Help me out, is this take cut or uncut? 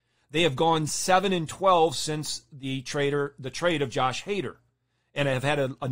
uncut